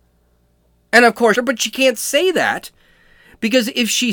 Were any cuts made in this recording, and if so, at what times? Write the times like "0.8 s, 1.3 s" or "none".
1.3 s

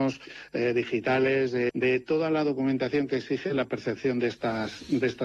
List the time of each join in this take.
1.7 s

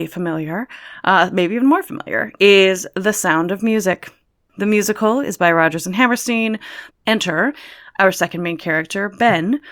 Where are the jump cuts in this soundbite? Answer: 6.9 s

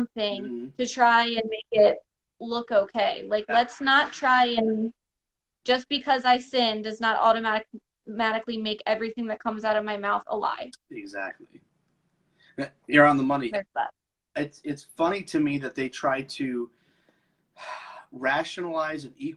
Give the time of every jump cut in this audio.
none

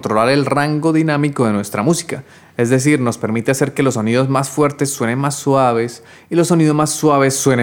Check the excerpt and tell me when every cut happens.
none

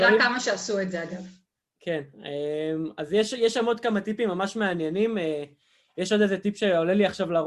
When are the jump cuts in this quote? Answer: none

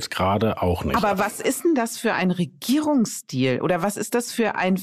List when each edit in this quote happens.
none

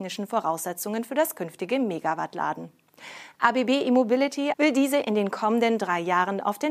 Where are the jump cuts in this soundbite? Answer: 4.5 s

